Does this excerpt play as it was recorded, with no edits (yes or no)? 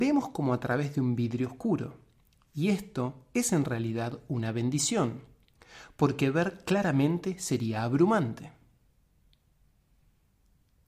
yes